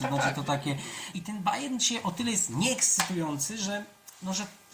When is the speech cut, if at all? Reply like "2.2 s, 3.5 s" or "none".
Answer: 1.1 s